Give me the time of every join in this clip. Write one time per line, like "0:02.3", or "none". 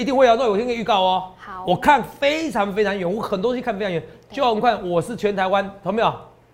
none